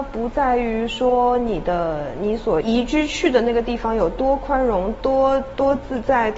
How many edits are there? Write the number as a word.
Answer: two